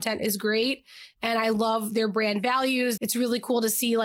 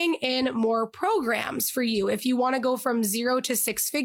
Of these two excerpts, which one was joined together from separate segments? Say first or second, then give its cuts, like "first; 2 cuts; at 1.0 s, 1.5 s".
first; 1 cut; at 3.0 s